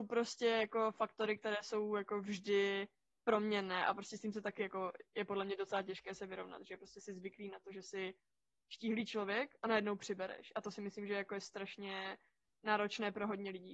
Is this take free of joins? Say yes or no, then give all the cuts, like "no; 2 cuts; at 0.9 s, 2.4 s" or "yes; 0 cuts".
yes; 0 cuts